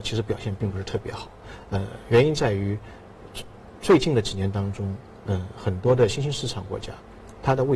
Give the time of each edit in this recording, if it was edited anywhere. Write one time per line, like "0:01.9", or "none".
none